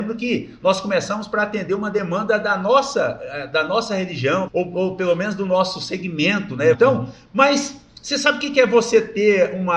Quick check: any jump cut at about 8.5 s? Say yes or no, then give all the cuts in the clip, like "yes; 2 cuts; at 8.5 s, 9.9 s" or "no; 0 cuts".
no; 2 cuts; at 4.5 s, 6.7 s